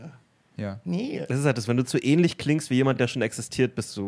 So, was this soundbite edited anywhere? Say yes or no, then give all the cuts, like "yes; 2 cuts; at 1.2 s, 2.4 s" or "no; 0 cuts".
no; 0 cuts